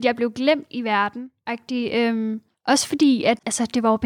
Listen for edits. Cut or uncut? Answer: uncut